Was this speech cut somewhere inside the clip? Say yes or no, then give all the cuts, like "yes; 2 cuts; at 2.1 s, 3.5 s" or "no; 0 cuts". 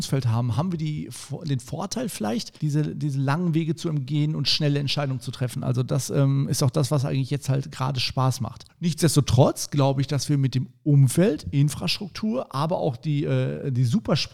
yes; 1 cut; at 2.6 s